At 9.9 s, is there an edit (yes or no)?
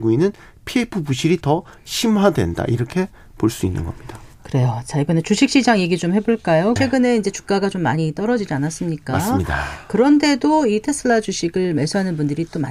no